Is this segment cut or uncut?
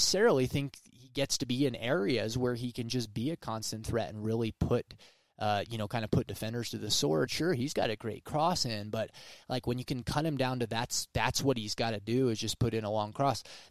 cut